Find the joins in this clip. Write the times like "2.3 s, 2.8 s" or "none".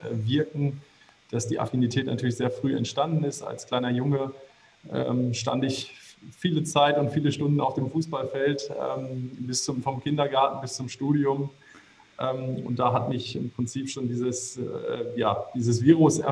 none